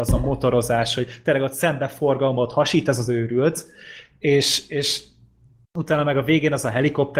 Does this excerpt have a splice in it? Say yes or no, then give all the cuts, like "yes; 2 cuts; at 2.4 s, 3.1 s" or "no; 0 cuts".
no; 0 cuts